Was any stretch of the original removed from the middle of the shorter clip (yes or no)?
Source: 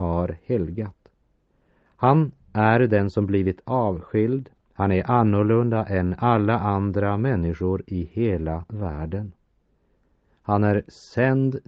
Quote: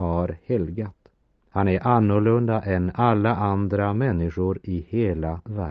yes